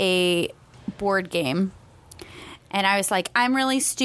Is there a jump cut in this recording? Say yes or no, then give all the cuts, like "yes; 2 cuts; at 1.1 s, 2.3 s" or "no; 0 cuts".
no; 0 cuts